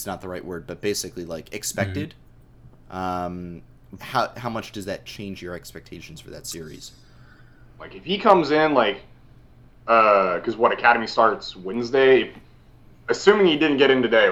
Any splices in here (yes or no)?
yes